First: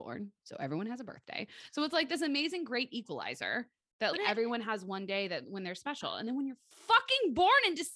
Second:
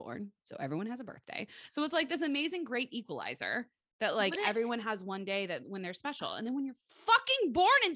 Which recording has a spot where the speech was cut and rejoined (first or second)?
first